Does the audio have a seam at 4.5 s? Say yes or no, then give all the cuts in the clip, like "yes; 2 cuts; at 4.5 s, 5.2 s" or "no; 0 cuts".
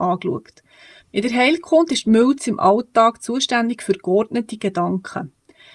no; 1 cut; at 1.0 s